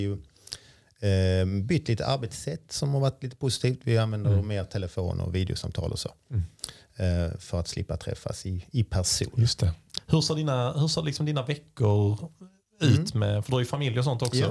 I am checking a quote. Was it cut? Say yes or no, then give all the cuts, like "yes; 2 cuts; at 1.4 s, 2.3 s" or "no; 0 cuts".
yes; 1 cut; at 10.0 s